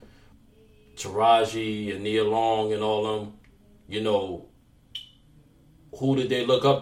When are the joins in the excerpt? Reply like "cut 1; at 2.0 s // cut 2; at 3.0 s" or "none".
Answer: none